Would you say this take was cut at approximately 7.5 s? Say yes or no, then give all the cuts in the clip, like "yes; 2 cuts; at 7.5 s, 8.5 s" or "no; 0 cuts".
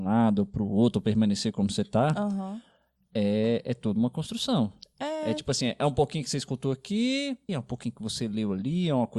yes; 1 cut; at 7.5 s